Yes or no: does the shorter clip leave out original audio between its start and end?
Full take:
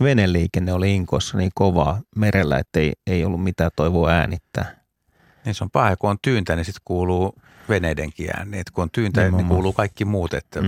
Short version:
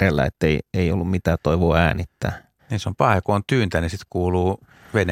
yes